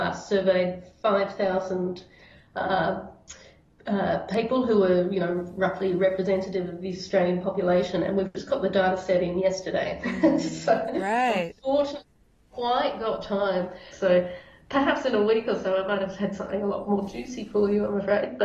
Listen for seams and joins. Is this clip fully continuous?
no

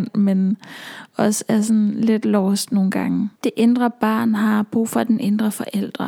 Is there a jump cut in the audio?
yes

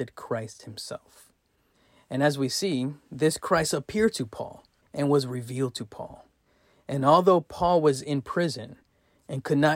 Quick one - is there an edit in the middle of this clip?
no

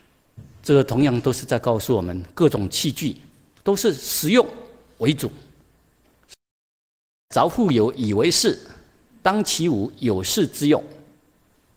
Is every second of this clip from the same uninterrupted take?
yes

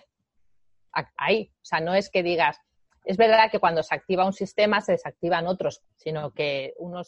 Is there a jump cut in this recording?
yes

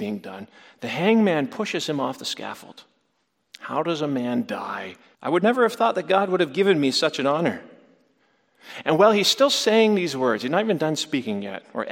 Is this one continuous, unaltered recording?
no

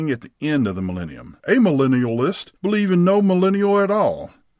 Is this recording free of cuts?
no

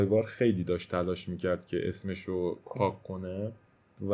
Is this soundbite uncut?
no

